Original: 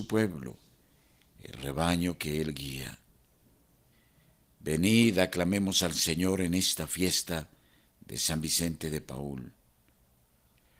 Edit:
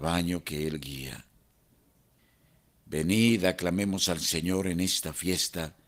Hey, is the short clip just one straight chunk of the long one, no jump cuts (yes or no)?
yes